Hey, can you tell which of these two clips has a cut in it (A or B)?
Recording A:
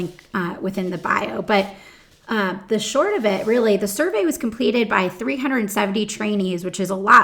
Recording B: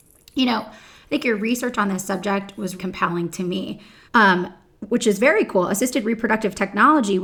B